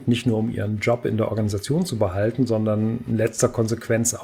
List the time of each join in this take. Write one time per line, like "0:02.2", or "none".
none